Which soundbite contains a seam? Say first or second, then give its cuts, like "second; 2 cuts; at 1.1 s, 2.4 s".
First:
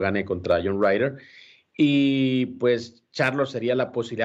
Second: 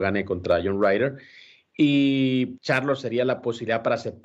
second; 1 cut; at 2.6 s